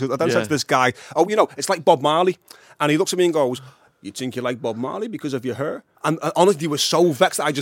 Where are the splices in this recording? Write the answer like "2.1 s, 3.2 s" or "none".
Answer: 5.9 s